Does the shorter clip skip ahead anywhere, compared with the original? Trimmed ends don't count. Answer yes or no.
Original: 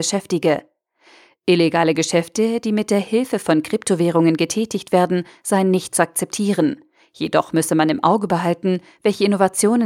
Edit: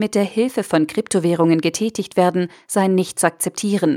no